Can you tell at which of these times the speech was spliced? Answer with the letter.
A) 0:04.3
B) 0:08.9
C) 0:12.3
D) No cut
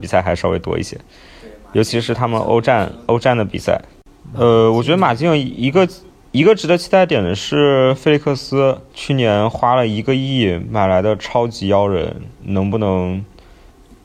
B